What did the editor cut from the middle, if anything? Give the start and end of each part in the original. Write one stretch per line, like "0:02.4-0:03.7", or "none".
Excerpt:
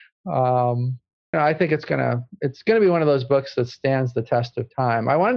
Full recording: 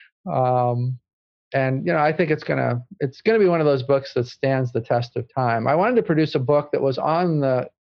0:01.3-0:01.9